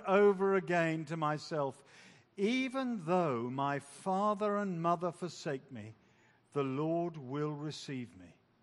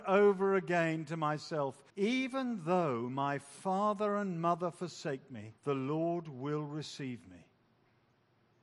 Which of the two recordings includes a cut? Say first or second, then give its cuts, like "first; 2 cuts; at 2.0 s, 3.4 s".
second; 2 cuts; at 1.9 s, 5.6 s